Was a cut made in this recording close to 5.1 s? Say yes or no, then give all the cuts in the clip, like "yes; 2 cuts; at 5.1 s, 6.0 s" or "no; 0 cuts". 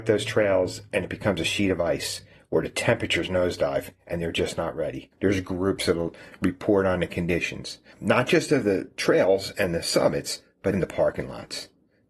yes; 2 cuts; at 5.1 s, 10.7 s